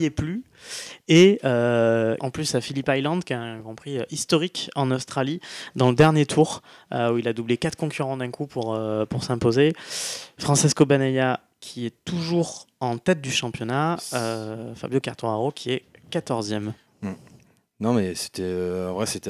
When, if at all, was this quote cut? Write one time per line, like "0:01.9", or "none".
0:02.2